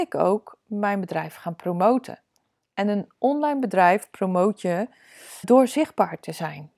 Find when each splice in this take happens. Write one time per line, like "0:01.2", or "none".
0:05.4